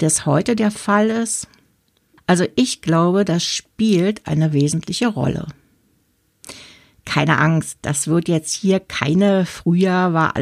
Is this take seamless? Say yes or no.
no